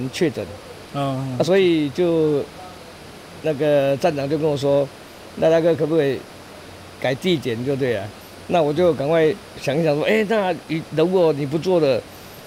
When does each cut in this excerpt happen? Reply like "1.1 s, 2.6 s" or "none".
8.2 s